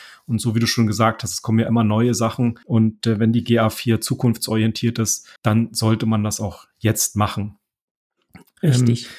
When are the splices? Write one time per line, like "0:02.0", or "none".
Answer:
0:02.6
0:05.4